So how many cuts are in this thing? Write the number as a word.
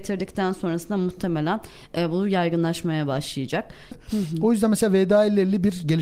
one